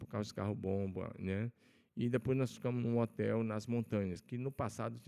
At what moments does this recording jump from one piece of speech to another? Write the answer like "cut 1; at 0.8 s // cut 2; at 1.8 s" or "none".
none